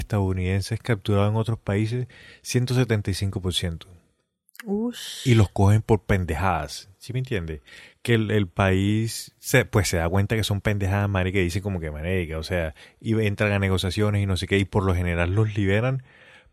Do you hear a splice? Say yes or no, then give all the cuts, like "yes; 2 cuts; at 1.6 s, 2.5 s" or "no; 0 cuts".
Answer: no; 0 cuts